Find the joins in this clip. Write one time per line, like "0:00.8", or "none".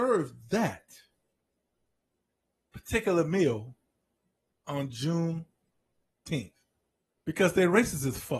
0:07.2